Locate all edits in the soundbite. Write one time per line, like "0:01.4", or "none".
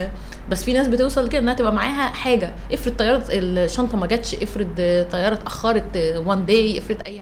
none